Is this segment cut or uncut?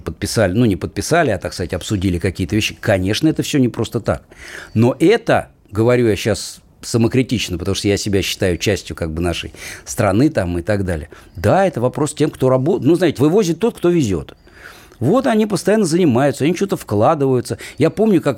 cut